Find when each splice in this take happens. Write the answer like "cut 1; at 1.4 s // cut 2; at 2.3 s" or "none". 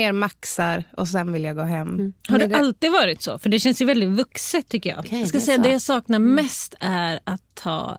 cut 1; at 5.0 s